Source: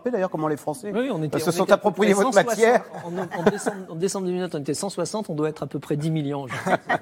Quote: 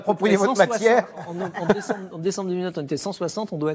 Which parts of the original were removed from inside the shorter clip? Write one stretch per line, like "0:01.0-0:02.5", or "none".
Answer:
none

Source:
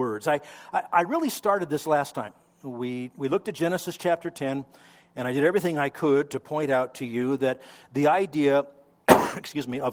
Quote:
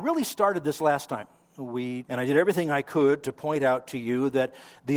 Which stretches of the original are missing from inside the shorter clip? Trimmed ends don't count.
0:03.1-0:05.1

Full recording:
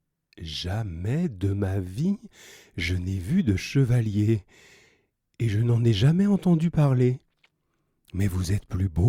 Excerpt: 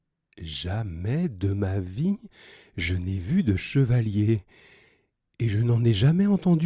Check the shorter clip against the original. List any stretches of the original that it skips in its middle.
none

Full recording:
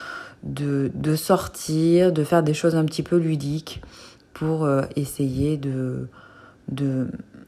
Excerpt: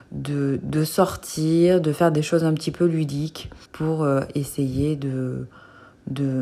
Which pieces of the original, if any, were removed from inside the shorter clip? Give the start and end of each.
0:04.0-0:04.3

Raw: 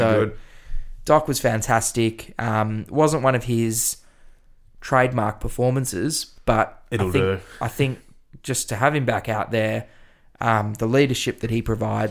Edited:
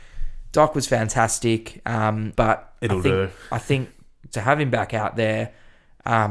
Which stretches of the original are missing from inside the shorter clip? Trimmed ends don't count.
0:02.8-0:06.4
0:08.4-0:08.7

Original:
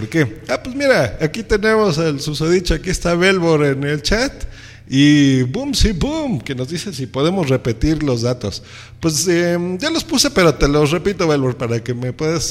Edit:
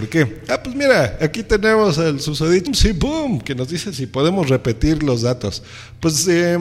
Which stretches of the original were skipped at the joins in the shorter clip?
0:02.7-0:05.7

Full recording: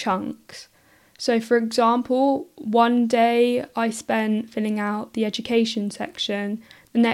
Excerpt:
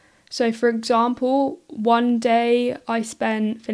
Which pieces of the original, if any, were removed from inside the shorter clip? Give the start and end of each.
none

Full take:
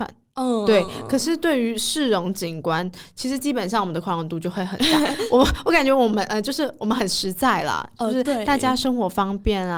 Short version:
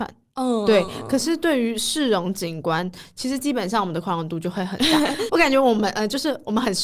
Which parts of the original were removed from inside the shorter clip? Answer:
0:05.3-0:05.6

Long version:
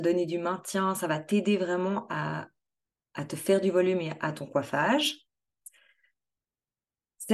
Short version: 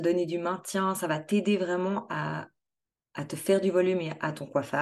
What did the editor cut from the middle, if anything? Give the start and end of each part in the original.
none

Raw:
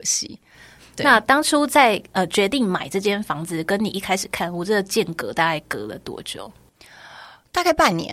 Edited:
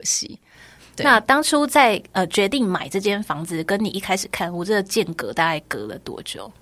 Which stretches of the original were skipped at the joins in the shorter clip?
none

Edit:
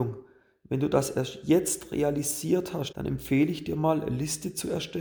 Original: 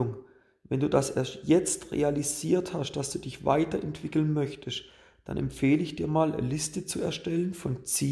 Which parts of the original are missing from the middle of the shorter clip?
0:02.9-0:05.2

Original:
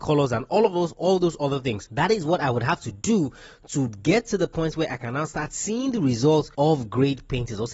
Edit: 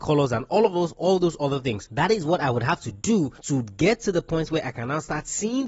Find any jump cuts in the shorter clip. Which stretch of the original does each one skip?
0:03.4-0:03.6

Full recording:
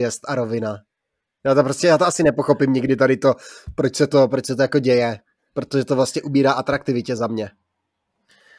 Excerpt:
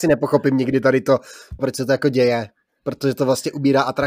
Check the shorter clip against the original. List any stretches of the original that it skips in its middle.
0:03.7-0:04.3

